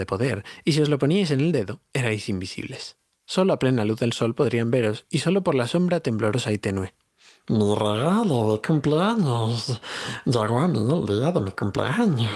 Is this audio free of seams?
yes; 0 cuts

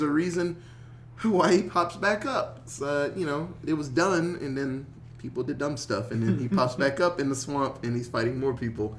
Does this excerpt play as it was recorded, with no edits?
yes; 0 cuts

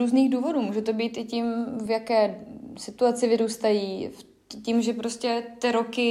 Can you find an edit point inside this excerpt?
no; 0 cuts

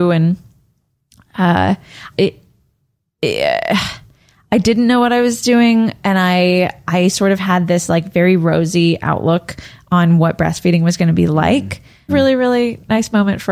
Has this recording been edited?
yes; 2 cuts; at 2.1 s, 12.1 s

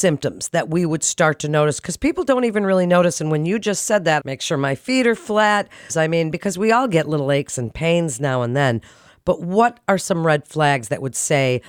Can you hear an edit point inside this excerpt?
yes; 2 cuts; at 4.2 s, 5.9 s

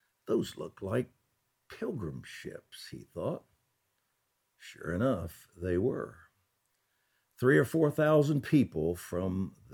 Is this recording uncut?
yes; 0 cuts

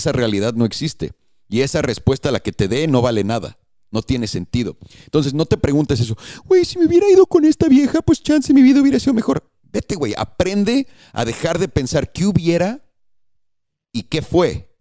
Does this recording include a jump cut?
no; 0 cuts

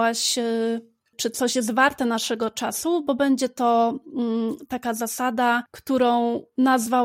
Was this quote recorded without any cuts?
yes; 0 cuts

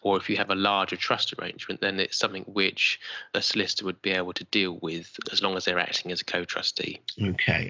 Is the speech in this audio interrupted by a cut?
no; 0 cuts

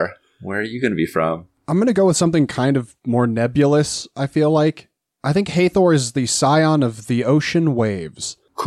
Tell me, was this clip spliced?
no; 0 cuts

